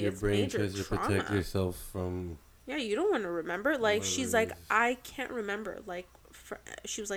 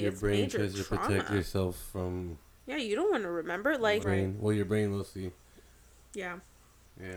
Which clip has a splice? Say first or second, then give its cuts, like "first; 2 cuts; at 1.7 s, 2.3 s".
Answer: second; 1 cut; at 4.0 s